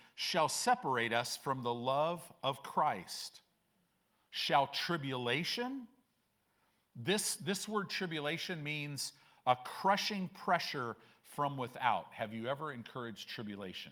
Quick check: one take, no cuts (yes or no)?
yes